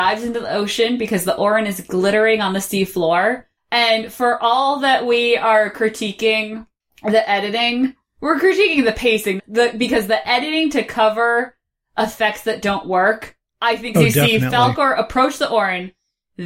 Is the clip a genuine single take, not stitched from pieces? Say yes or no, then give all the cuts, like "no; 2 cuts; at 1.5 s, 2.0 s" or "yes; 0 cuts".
no; 2 cuts; at 9.4 s, 13.9 s